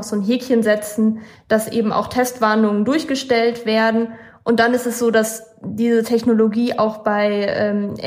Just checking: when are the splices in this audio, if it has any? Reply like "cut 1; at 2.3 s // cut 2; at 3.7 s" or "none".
none